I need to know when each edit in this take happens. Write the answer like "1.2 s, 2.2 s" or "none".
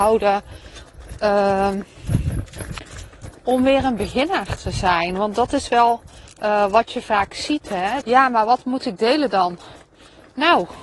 8.0 s